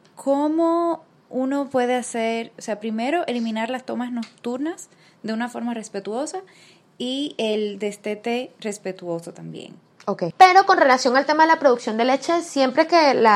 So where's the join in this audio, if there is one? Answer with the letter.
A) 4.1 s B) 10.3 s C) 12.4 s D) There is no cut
B